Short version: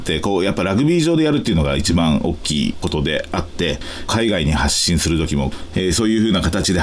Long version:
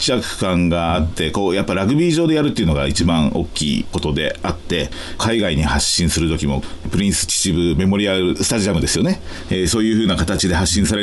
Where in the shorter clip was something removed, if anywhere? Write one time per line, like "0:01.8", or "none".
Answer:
0:05.7